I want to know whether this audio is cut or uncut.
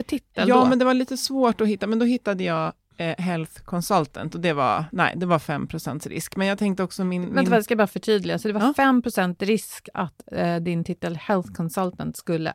uncut